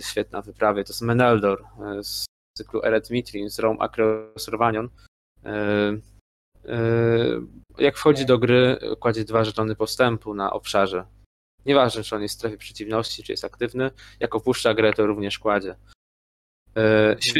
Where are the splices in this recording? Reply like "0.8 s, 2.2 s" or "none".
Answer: none